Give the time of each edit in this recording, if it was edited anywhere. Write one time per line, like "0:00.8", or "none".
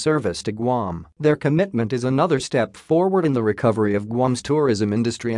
0:01.1